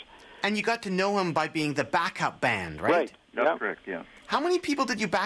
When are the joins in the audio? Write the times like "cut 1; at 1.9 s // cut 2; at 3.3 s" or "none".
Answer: none